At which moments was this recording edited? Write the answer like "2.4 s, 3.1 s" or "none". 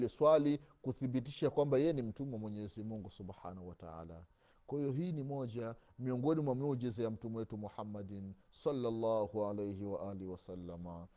none